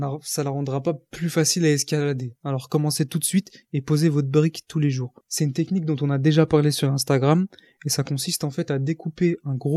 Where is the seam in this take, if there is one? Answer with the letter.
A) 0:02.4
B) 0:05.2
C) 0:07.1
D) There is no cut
B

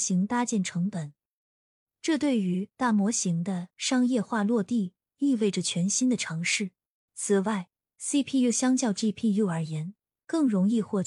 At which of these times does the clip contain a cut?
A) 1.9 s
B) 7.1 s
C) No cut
B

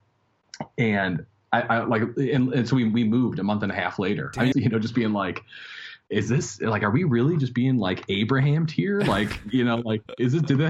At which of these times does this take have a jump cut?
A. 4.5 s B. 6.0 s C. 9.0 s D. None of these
A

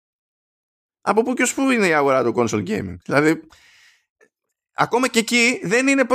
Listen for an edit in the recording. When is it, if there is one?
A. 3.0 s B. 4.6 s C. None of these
A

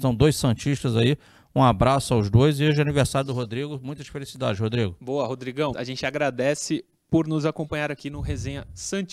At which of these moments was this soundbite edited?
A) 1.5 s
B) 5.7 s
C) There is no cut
B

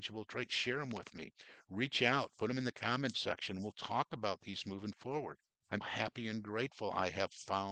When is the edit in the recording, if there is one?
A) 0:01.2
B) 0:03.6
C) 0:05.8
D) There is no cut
C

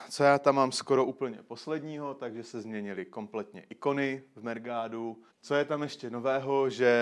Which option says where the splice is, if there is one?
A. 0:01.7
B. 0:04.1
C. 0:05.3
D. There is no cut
C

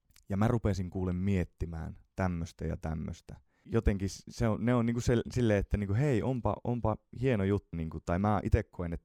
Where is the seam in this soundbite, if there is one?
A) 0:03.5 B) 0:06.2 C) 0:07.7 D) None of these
C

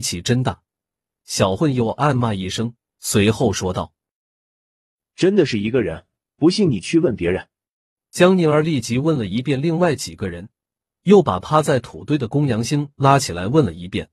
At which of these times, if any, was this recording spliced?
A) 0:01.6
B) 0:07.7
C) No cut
A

